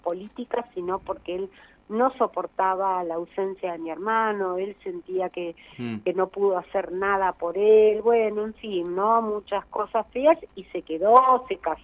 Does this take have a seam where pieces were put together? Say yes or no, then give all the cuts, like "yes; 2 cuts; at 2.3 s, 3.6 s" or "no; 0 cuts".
no; 0 cuts